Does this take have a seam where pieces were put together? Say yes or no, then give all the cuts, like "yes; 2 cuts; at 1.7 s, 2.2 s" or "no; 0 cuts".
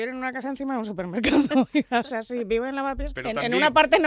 yes; 1 cut; at 3.2 s